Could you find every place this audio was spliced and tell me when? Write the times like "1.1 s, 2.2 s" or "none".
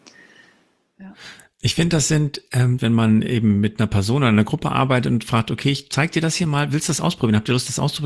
2.8 s